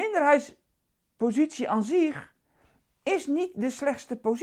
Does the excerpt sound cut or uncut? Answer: uncut